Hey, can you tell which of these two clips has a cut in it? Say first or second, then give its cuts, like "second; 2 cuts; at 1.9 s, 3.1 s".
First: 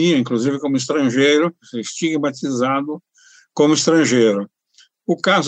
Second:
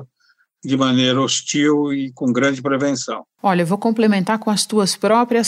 second; 1 cut; at 3.4 s